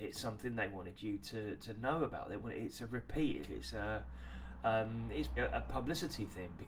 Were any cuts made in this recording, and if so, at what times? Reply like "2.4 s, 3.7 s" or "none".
3.4 s, 5.4 s